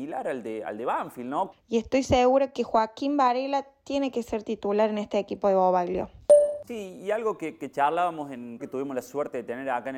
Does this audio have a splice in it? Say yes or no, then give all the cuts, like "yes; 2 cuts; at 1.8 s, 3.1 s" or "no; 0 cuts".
yes; 3 cuts; at 1.5 s, 6.6 s, 8.6 s